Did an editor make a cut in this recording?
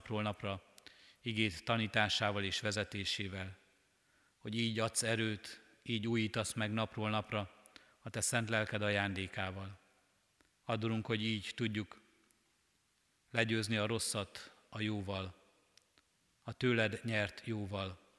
yes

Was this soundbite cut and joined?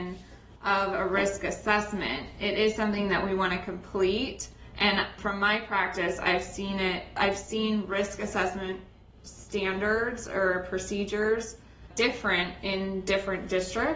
no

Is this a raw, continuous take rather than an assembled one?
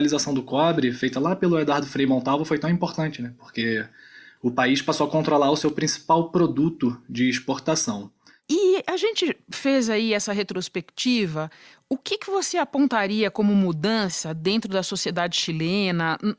yes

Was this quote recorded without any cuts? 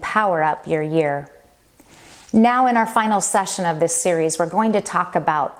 yes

